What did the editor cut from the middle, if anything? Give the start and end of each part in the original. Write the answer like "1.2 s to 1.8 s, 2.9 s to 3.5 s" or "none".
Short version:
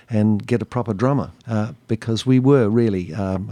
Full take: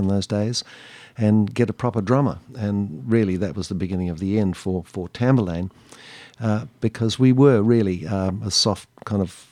2.5 s to 6.3 s